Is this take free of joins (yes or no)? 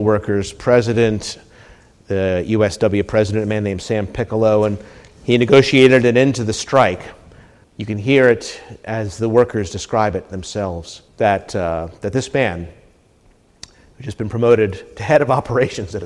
no